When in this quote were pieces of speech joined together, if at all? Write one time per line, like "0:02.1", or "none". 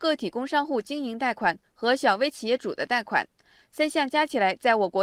none